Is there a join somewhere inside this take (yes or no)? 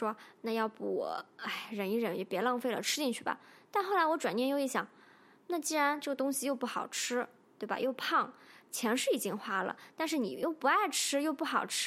no